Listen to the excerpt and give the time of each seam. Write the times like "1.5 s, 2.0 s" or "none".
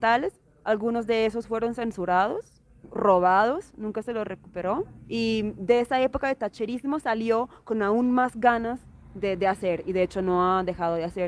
5.0 s

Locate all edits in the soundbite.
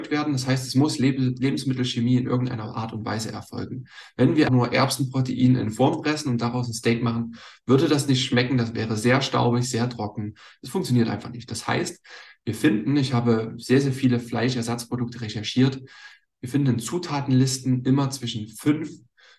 4.5 s

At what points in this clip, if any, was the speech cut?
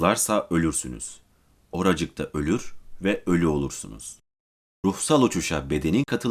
none

